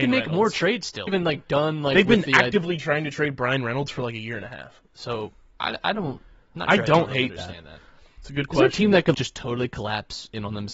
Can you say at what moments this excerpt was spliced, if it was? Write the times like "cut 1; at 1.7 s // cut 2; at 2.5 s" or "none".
cut 1; at 1.1 s // cut 2; at 8.1 s // cut 3; at 9.1 s